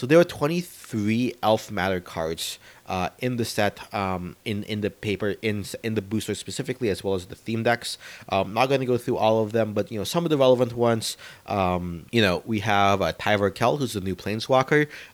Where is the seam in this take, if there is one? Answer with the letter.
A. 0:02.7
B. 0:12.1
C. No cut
B